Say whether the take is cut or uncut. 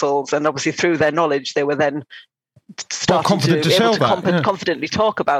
uncut